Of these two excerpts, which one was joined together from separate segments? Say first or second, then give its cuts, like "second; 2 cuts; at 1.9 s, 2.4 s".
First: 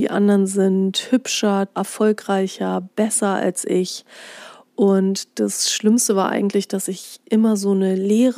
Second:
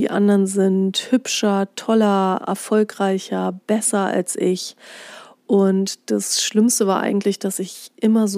first; 1 cut; at 1.7 s